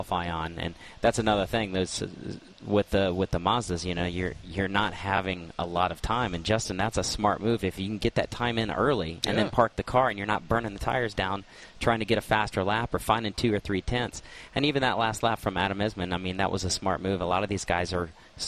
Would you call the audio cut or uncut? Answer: uncut